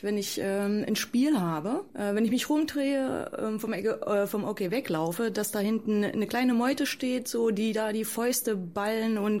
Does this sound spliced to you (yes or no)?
yes